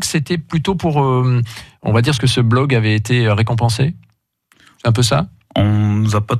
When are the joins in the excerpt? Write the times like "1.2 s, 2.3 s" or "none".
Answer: 2.2 s